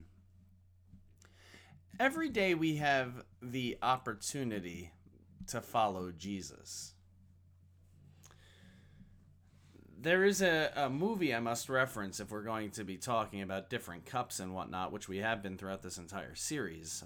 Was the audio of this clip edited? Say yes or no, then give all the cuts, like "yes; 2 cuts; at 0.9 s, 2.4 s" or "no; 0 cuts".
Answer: no; 0 cuts